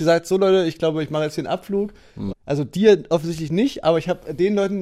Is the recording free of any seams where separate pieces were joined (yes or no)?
no